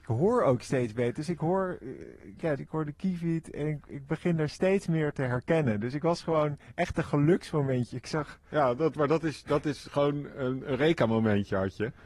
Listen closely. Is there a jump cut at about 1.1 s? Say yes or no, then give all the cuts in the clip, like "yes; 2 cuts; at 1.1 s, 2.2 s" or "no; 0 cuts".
no; 1 cut; at 2.6 s